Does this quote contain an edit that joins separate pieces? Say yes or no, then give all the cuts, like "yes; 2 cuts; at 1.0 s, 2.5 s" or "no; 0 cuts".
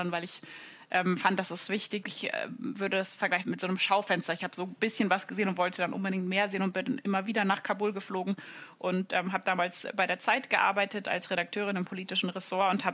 yes; 2 cuts; at 2.0 s, 3.4 s